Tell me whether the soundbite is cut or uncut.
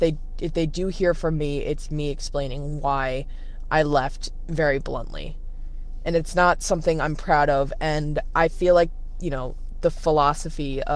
uncut